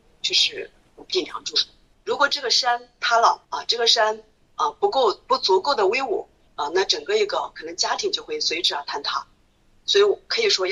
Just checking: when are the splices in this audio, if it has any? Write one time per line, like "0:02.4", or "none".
0:01.9
0:03.4
0:06.5